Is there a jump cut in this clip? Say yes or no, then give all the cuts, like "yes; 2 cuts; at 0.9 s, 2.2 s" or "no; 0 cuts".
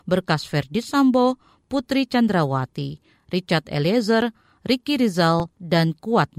no; 0 cuts